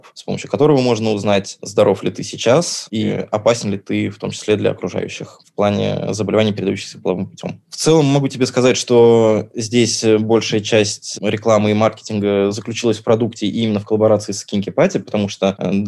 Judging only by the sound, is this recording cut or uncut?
uncut